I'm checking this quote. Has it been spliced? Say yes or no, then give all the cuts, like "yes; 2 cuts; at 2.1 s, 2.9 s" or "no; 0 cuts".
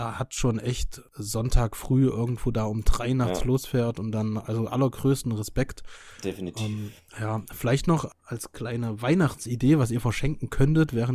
no; 0 cuts